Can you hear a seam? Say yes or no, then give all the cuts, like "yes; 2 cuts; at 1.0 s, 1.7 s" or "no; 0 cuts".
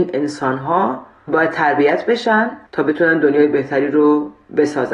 yes; 1 cut; at 2.7 s